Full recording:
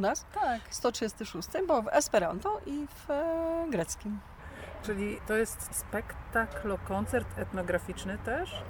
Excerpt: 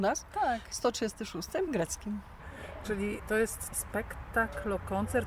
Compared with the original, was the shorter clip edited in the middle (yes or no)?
yes